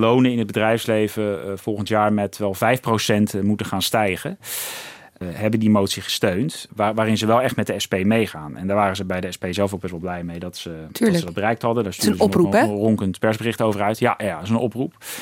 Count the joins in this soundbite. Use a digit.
2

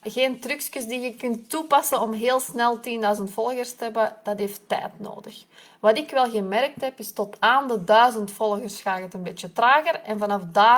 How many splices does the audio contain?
0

